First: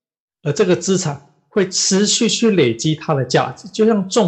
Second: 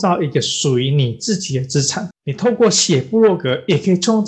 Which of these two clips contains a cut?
second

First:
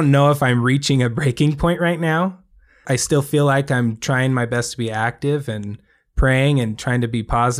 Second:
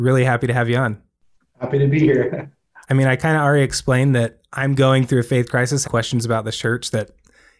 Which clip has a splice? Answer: second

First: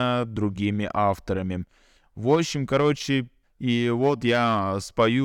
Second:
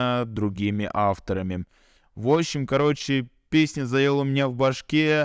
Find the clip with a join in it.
first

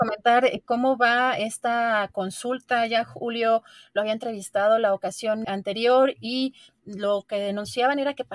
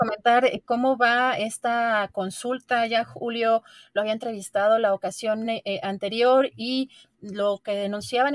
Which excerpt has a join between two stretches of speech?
first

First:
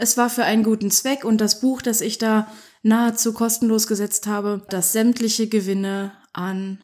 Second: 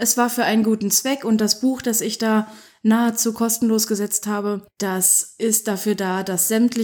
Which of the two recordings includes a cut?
first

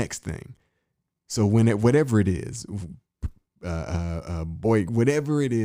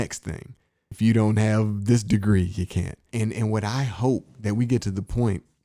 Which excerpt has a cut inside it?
second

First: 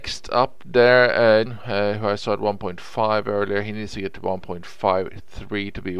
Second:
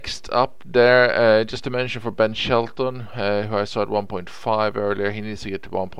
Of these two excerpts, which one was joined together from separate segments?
first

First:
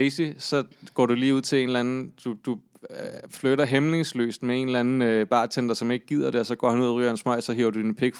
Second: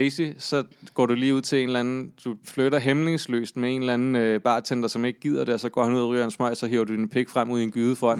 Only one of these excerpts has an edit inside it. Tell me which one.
second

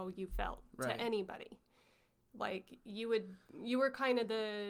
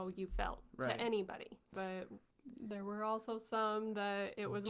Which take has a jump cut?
second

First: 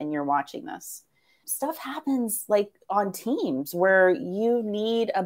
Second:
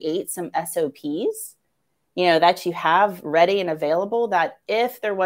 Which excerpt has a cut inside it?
first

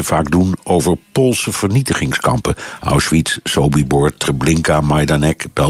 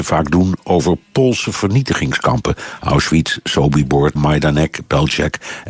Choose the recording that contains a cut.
second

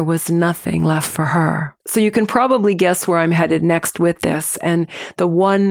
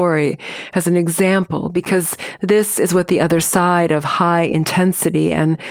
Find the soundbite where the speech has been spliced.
first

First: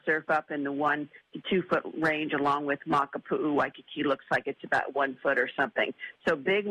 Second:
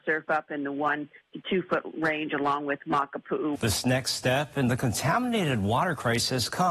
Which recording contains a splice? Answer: second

